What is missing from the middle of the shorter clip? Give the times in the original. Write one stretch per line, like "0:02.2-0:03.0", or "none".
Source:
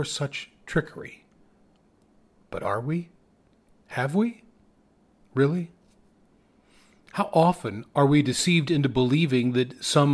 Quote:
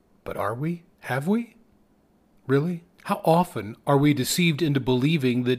0:03.2-0:03.8
0:05.8-0:07.0